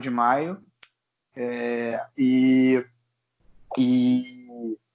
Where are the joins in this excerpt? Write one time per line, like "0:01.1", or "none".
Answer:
none